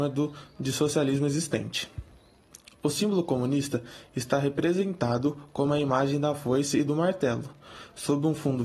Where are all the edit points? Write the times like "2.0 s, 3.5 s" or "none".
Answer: none

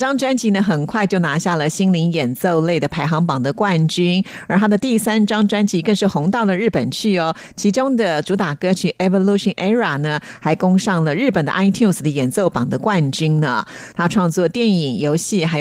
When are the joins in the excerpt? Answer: 13.9 s

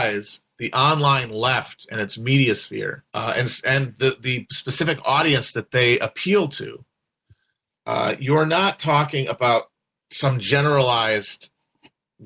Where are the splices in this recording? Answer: 3.1 s

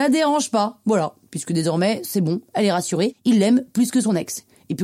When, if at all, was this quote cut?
none

